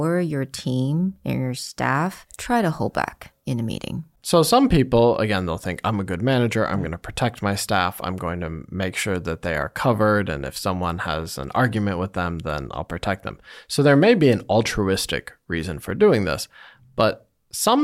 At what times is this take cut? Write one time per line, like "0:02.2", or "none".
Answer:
none